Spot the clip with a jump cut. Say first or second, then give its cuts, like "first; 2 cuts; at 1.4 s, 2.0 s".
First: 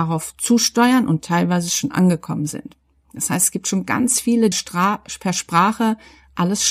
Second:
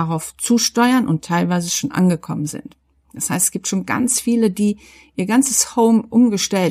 first; 1 cut; at 4.5 s